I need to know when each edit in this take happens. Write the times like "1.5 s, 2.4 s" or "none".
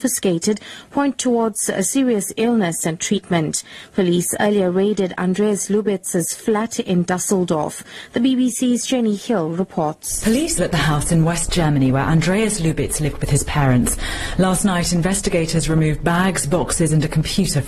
10.6 s

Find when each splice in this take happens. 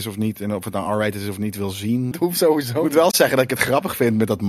2.1 s

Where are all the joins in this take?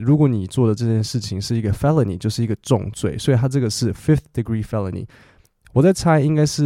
none

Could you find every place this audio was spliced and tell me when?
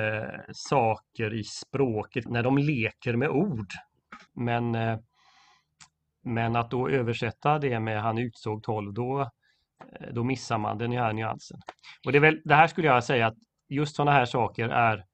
2.3 s, 4.3 s

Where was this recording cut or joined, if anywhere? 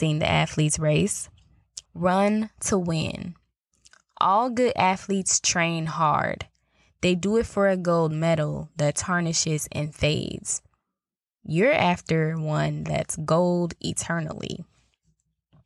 1.8 s

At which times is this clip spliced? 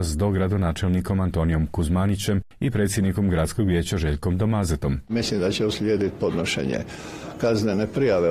5.1 s

